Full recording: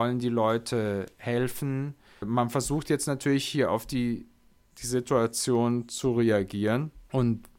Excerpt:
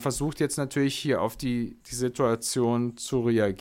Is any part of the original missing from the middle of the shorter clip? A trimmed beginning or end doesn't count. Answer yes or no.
yes